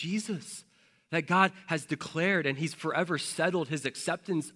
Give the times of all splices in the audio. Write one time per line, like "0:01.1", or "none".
none